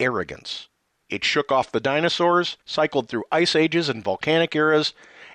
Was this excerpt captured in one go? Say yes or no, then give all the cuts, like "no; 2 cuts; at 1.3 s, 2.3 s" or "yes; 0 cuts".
no; 2 cuts; at 0.9 s, 2.6 s